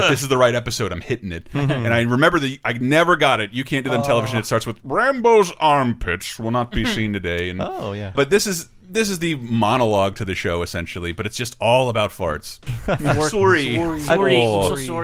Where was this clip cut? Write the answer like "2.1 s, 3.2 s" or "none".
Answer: 8.2 s, 12.7 s